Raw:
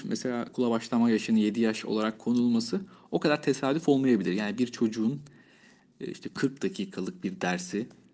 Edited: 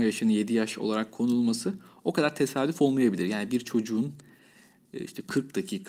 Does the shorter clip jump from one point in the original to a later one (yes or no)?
no